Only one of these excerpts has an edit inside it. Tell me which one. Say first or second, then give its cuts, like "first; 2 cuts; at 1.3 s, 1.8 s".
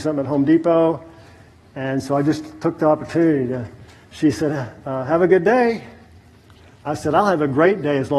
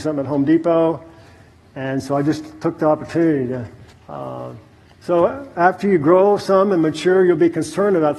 second; 1 cut; at 3.9 s